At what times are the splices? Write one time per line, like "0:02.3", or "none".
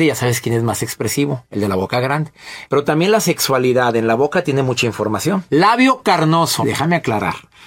0:02.7
0:05.5
0:06.6